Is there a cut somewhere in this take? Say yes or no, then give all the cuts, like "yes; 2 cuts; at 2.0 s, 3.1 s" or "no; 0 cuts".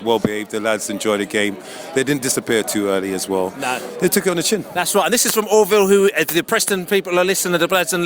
no; 0 cuts